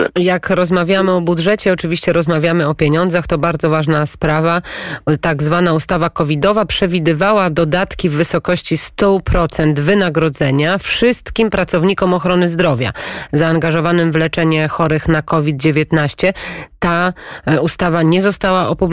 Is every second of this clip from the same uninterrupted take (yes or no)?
yes